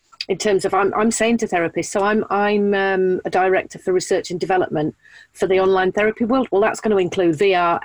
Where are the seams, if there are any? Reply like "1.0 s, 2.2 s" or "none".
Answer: none